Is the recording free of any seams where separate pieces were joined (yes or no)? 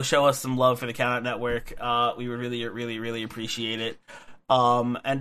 yes